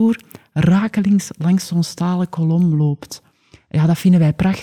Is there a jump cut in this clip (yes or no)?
no